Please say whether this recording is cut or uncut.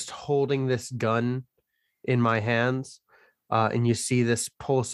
uncut